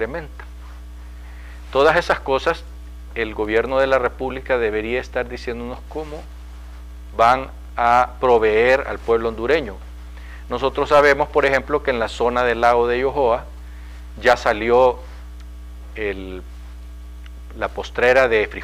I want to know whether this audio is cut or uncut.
uncut